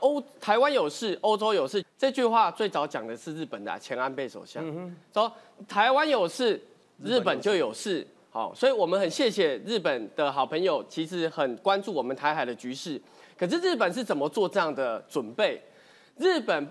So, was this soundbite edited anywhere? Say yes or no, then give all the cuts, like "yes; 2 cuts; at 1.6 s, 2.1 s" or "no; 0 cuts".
yes; 1 cut; at 1.8 s